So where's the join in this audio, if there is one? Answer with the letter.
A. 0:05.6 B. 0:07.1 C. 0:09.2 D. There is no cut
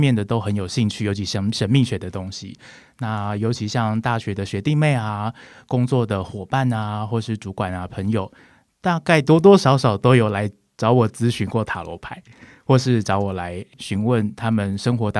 D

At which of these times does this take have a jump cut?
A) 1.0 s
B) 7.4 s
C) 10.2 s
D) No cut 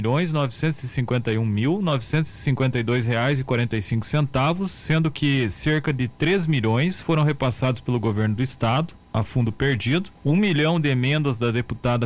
C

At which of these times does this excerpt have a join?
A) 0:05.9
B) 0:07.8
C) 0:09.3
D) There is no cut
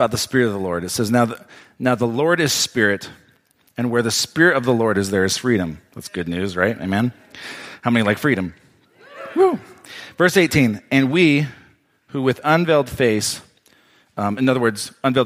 D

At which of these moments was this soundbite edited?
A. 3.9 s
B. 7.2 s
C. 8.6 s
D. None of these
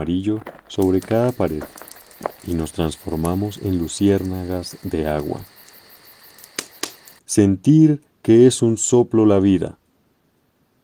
B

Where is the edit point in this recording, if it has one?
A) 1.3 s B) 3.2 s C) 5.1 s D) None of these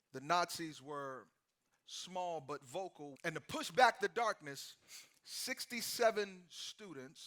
B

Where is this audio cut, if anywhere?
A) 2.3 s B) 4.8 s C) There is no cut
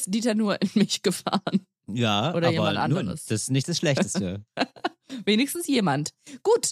C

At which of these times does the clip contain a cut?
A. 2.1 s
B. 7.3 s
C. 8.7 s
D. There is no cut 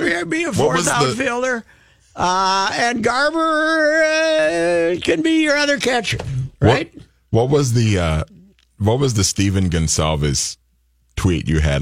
D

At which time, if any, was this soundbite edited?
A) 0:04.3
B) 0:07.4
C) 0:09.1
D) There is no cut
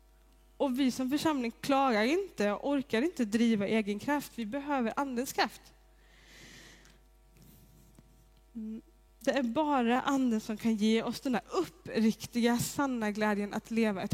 D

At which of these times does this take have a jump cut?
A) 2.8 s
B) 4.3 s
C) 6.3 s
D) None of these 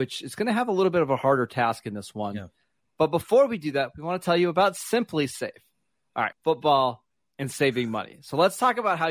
C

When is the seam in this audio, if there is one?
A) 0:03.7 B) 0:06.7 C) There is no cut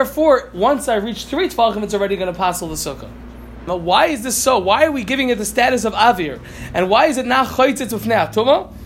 A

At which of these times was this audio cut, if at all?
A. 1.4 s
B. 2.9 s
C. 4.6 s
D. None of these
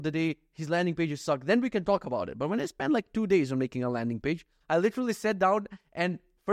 C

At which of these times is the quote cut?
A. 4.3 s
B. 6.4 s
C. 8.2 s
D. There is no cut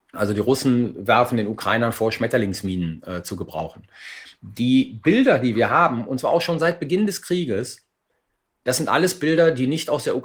D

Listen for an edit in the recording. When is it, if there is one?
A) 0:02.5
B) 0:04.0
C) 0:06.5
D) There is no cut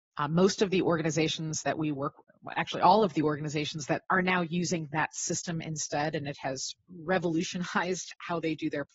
B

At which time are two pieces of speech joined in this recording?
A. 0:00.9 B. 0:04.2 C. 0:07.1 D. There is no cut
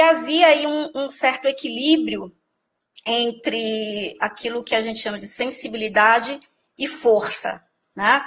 B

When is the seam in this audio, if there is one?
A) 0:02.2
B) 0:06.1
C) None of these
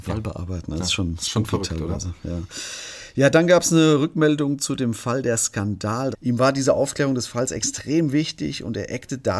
B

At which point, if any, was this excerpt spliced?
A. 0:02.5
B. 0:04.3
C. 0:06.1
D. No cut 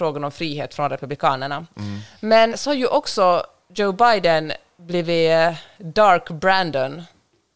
A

